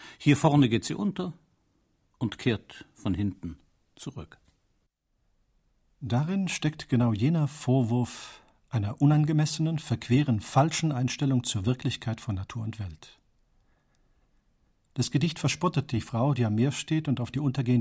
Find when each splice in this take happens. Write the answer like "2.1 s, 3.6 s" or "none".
none